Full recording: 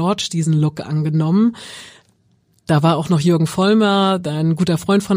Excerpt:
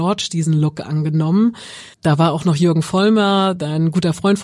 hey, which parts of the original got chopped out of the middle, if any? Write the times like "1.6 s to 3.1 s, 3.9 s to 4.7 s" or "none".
1.9 s to 2.6 s

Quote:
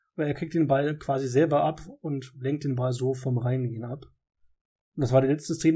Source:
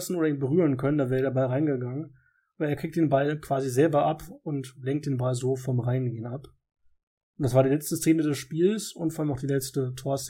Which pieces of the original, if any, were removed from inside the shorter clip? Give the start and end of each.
none

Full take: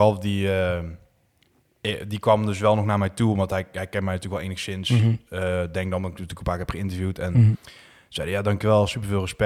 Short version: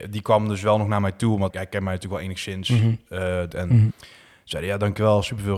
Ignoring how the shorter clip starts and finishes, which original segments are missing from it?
3.5 s to 3.7 s, 5.7 s to 7.1 s

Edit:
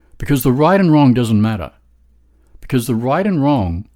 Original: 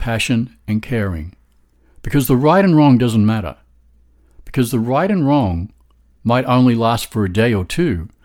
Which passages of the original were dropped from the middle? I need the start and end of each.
none

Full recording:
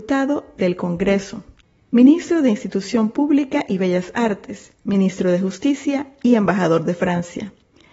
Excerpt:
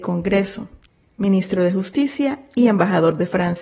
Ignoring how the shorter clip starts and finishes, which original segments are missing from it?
1.8 s to 4.7 s

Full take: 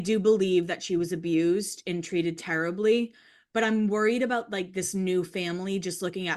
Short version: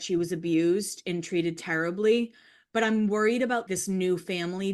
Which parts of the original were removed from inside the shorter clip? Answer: 4.5 s to 4.7 s

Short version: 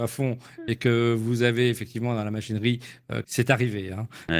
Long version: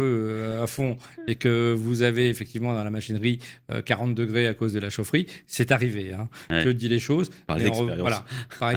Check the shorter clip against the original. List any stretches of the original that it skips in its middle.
3.8 s to 5.5 s

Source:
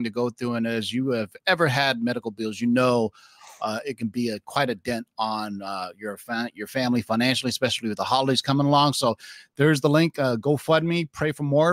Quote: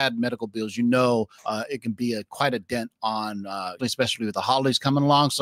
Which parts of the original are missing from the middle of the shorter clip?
3.2 s to 3.5 s, 5.9 s to 7.4 s

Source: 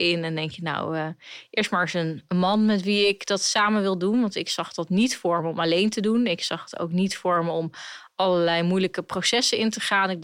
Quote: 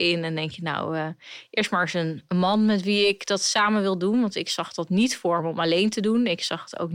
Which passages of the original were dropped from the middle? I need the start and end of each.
none

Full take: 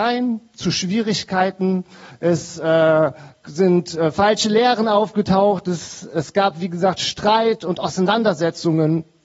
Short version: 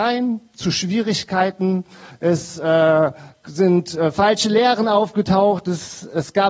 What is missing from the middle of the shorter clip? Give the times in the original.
none

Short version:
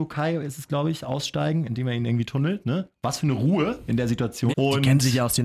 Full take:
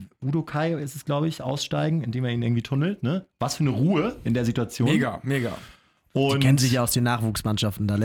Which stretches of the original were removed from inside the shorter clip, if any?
4.9 s to 6.1 s

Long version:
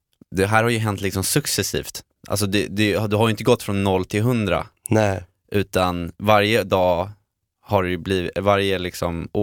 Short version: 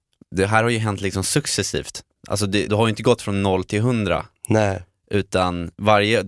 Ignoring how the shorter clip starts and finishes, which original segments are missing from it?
2.7 s to 3.1 s

